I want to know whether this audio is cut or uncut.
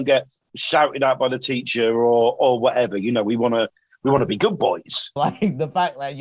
cut